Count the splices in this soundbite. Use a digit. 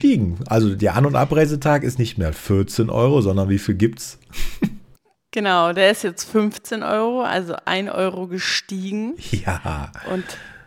0